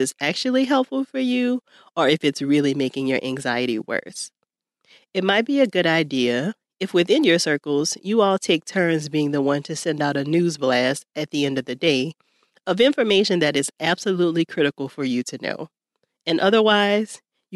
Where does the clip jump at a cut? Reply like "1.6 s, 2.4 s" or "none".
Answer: none